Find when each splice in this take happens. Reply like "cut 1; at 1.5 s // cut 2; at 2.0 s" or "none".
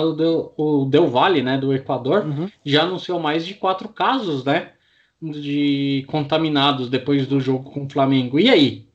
none

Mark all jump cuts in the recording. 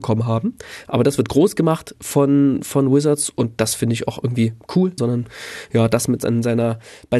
cut 1; at 5.0 s

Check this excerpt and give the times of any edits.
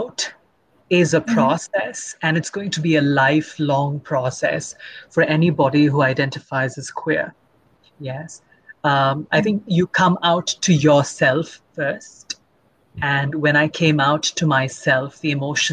none

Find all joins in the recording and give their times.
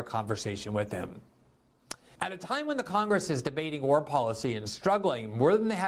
cut 1; at 2.2 s

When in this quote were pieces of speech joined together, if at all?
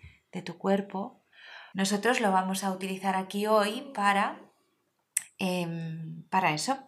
cut 1; at 1.7 s

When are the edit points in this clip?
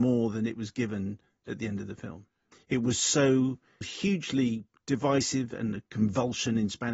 cut 1; at 2.5 s // cut 2; at 3.8 s

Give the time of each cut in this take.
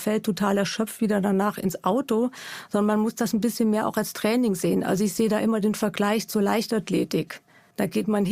none

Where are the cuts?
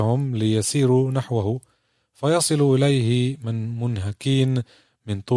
none

